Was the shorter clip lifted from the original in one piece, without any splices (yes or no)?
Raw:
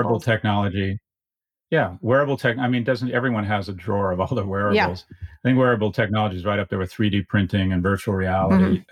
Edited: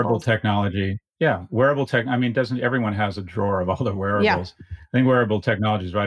no